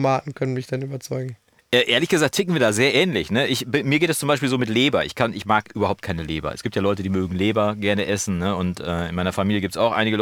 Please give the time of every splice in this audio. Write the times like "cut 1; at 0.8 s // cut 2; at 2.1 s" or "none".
none

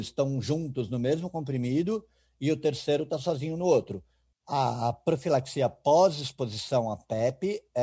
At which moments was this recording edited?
cut 1; at 4.3 s

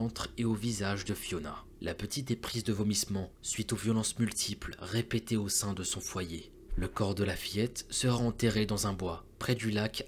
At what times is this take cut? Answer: cut 1; at 6.7 s

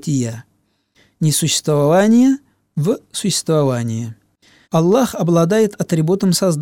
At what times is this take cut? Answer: cut 1; at 4.6 s

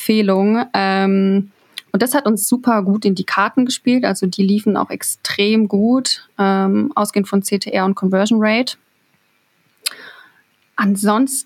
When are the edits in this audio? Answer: none

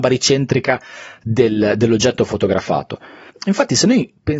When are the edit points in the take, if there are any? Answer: cut 1; at 3.3 s

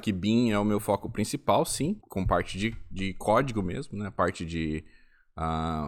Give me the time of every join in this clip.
cut 1; at 2.0 s

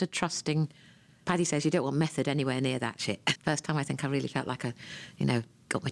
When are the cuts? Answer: cut 1; at 3.3 s

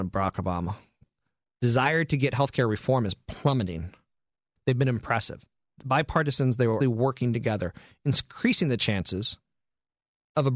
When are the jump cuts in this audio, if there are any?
cut 1; at 4.6 s // cut 2; at 6.8 s

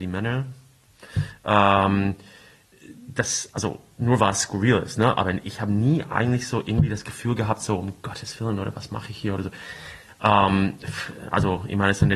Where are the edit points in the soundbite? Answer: cut 1; at 10.1 s

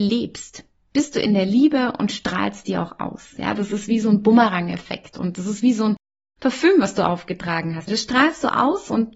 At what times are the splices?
cut 1; at 7.9 s

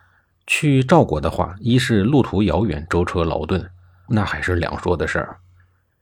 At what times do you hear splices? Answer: cut 1; at 4.1 s

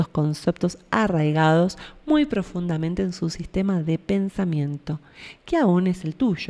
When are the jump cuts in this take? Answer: none

